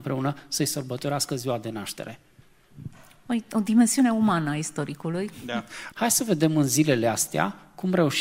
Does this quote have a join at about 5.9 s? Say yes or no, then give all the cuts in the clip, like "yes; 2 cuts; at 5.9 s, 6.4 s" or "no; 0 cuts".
yes; 1 cut; at 5.9 s